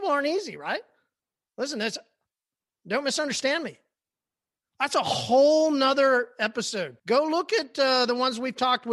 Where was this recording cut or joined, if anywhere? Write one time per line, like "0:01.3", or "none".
0:07.0

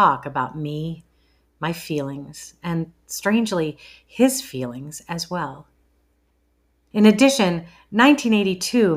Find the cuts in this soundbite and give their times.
0:06.9

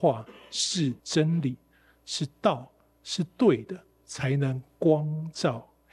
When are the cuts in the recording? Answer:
0:01.0

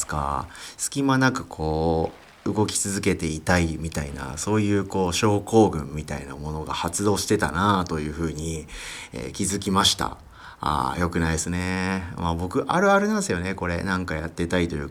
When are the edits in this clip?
none

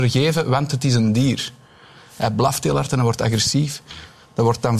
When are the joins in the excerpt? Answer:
none

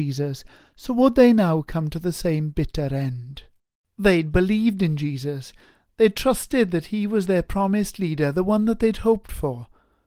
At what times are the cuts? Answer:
none

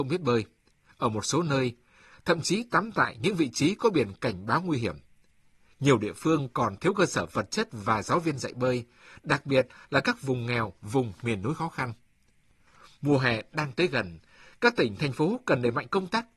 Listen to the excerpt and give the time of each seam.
0:02.1

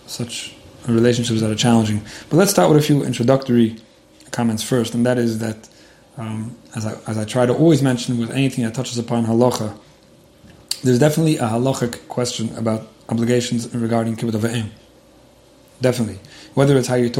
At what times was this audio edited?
none

